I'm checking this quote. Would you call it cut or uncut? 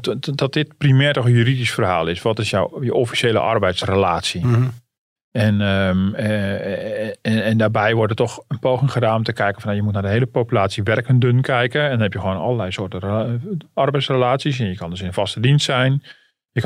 uncut